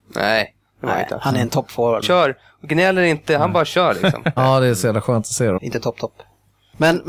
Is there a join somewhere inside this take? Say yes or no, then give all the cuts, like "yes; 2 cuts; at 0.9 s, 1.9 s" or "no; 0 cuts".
yes; 3 cuts; at 2.0 s, 4.4 s, 5.6 s